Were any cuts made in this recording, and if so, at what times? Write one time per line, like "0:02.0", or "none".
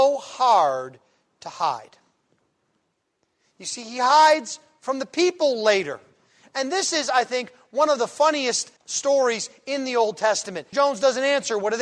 0:08.8
0:10.7